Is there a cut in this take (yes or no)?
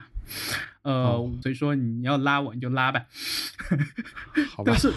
yes